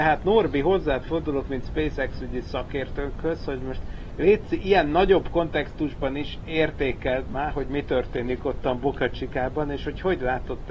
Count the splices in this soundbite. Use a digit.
0